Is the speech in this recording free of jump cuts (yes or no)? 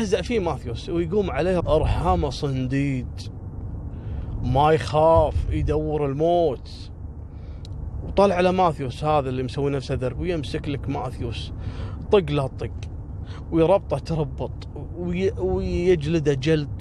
no